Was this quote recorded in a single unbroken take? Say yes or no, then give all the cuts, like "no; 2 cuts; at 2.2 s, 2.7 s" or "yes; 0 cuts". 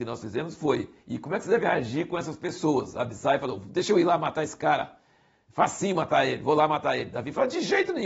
yes; 0 cuts